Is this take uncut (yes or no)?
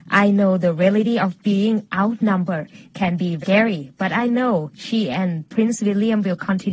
no